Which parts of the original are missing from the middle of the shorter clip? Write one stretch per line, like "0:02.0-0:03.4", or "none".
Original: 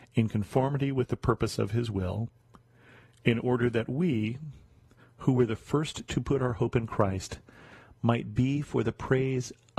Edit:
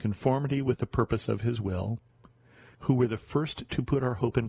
0:03.0-0:05.1